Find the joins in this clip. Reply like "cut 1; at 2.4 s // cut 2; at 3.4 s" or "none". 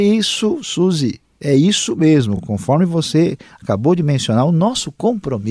none